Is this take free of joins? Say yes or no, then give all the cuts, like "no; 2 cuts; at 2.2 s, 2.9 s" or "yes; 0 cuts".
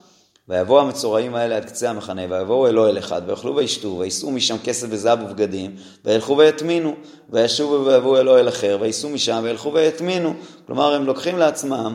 yes; 0 cuts